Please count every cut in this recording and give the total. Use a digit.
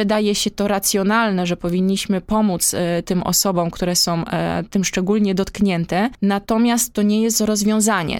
0